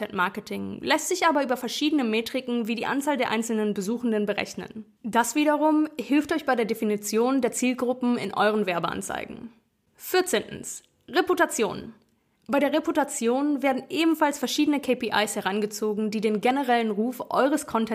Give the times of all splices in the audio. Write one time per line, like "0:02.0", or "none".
0:05.0

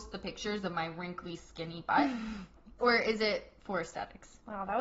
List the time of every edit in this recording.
0:01.4
0:02.8

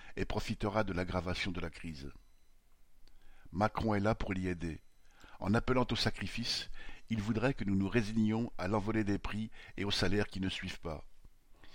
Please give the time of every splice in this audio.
none

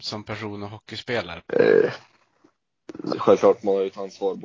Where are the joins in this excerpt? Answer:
0:01.4
0:03.1

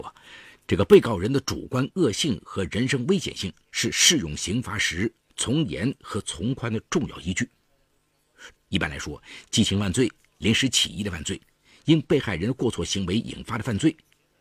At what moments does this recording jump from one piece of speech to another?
0:08.6

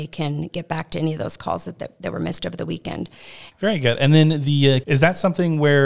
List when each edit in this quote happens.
0:03.5
0:04.8

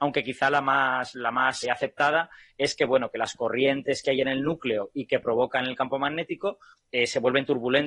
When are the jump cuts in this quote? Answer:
0:01.6
0:06.8

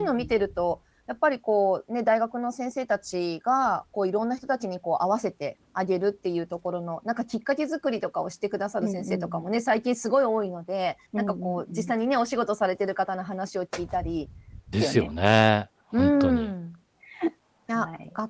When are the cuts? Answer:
0:11.1
0:14.7

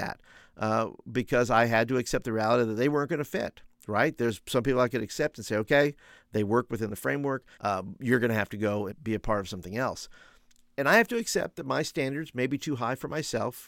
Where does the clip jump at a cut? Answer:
0:07.6
0:08.9

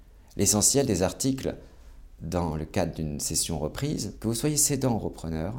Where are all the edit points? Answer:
none

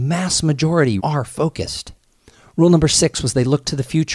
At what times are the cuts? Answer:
0:01.0

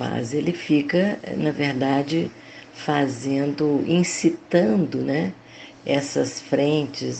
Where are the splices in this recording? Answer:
none

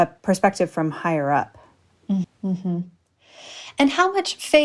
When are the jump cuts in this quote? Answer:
0:02.2

